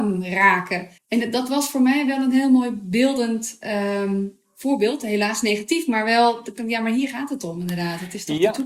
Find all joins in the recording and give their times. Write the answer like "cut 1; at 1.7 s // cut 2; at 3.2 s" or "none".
cut 1; at 1.0 s